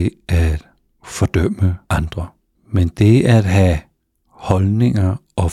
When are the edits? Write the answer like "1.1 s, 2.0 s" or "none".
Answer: 2.6 s